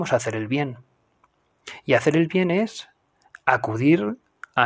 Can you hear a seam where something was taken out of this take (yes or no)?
no